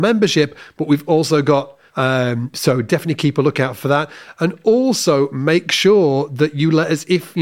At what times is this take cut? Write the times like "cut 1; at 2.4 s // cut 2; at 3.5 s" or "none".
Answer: cut 1; at 1.9 s

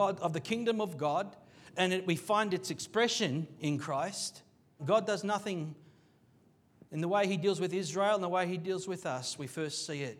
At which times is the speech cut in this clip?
cut 1; at 4.8 s

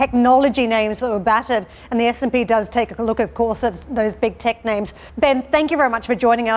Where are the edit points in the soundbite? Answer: cut 1; at 5.1 s

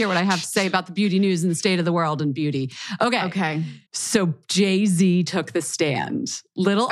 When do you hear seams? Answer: cut 1; at 3.9 s

